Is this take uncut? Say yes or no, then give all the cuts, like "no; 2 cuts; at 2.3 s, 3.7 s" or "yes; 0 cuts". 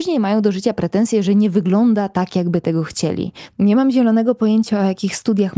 no; 1 cut; at 3.5 s